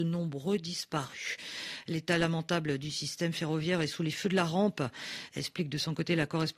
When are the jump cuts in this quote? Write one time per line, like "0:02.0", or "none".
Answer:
none

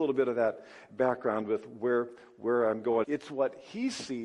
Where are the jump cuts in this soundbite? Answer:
0:03.0

